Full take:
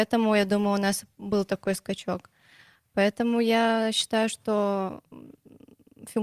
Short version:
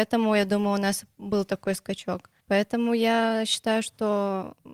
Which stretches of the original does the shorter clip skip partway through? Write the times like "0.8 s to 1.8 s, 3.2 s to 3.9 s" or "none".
2.4 s to 2.9 s